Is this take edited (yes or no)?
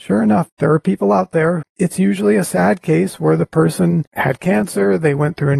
yes